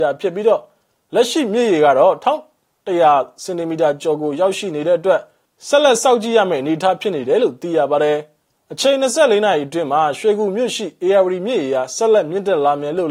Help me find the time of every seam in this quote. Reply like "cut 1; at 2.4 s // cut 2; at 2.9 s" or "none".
none